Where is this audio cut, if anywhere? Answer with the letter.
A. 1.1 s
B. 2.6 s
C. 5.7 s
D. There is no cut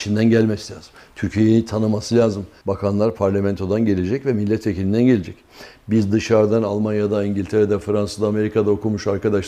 B